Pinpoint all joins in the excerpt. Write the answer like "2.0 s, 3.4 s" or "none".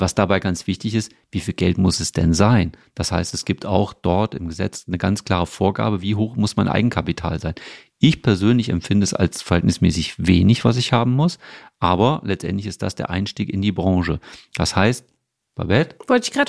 none